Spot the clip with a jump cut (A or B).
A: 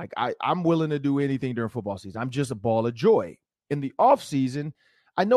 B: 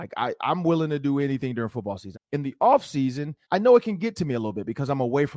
B